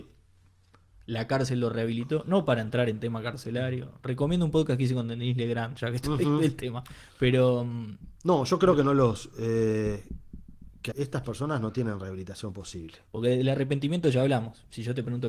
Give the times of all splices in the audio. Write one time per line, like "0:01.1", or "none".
0:10.9
0:13.1